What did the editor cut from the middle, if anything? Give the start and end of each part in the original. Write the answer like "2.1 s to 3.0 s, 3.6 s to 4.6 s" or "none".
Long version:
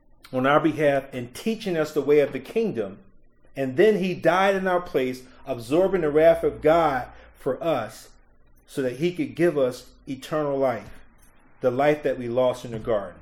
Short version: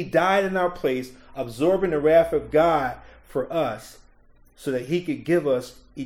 none